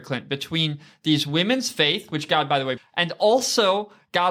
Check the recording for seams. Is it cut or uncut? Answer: cut